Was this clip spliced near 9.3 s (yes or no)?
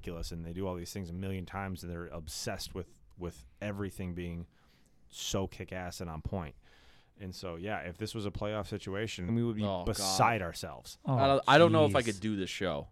yes